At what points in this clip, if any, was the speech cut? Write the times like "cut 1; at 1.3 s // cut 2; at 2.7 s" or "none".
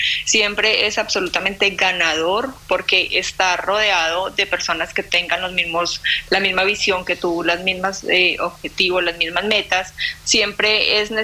none

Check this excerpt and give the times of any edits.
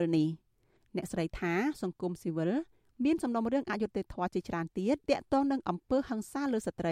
cut 1; at 5.0 s

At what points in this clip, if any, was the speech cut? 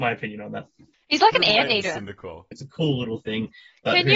cut 1; at 0.9 s // cut 2; at 2.5 s

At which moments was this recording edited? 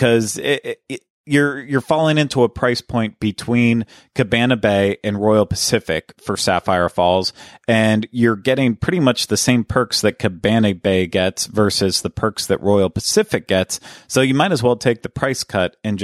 none

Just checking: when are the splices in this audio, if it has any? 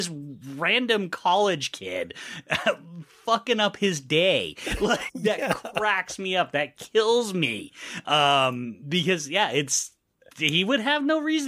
cut 1; at 5.1 s

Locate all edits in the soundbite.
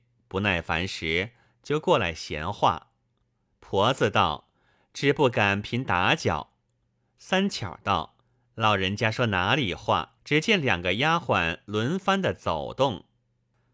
cut 1; at 5.6 s // cut 2; at 8.2 s // cut 3; at 10.2 s

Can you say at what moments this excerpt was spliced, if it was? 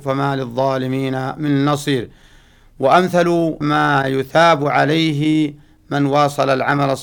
cut 1; at 3.6 s

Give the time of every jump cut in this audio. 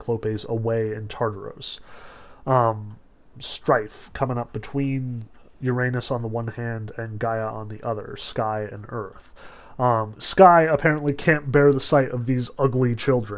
cut 1; at 3.3 s

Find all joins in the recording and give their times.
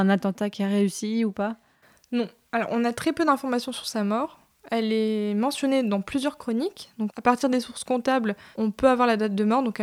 none

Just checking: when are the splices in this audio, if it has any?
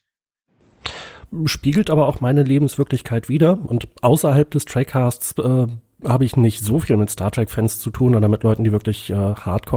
none

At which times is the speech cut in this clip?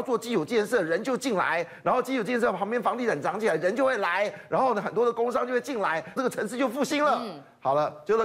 cut 1; at 6.2 s

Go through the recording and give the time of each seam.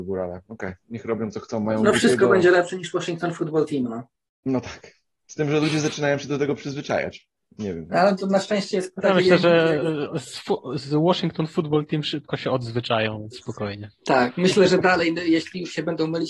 none

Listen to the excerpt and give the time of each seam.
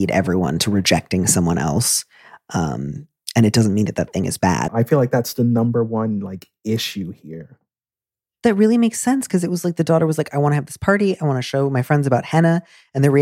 cut 1; at 4.7 s

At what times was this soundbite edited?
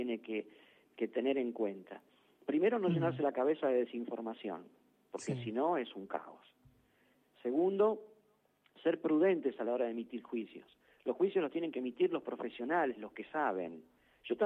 none

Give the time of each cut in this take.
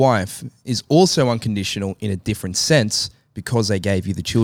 none

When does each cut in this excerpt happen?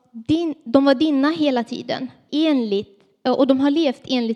cut 1; at 2.3 s

